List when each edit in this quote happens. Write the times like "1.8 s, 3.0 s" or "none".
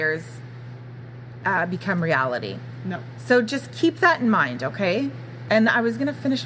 none